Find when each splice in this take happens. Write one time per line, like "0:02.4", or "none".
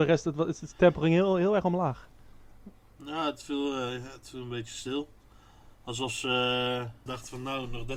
0:07.1